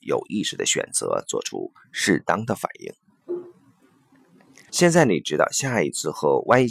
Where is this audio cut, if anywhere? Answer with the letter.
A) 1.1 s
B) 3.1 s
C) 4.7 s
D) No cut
C